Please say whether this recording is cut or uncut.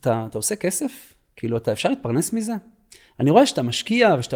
uncut